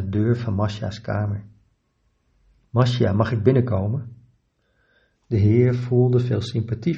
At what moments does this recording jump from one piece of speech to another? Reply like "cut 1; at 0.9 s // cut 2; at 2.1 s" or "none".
cut 1; at 5.2 s